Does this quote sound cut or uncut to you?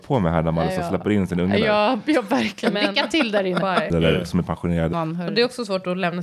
cut